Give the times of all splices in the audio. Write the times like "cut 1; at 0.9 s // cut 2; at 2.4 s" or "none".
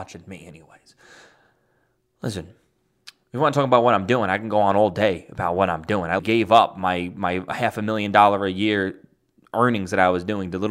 cut 1; at 6.2 s

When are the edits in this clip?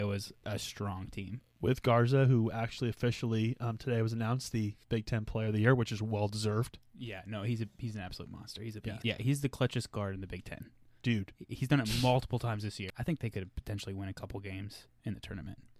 cut 1; at 9.0 s // cut 2; at 12.9 s

